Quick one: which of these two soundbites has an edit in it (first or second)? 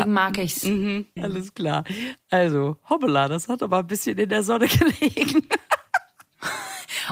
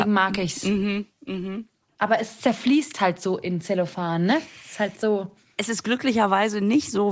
first